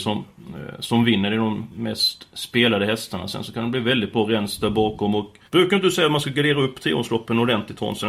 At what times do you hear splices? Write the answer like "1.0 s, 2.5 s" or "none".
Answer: 5.5 s